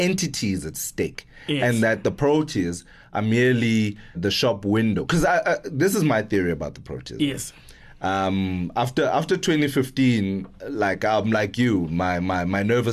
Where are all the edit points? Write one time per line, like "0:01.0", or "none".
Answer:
0:04.1